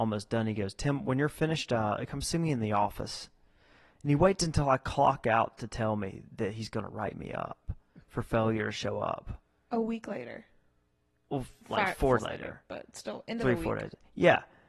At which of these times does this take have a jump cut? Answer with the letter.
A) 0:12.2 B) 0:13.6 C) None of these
A